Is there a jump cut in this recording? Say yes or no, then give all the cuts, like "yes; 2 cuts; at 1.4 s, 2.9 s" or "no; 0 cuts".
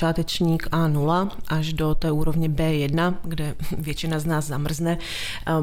no; 0 cuts